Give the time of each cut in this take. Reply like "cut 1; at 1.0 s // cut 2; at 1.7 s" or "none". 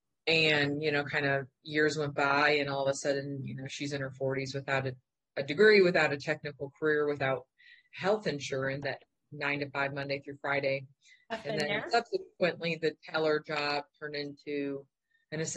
cut 1; at 8.8 s